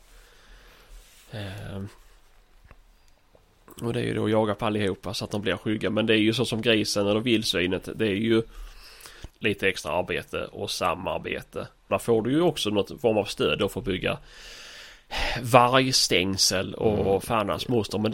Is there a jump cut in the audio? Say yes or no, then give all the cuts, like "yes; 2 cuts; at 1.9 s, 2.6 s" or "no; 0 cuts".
yes; 2 cuts; at 9.3 s, 11.9 s